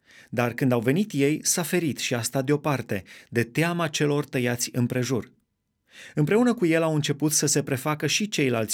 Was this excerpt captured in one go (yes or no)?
yes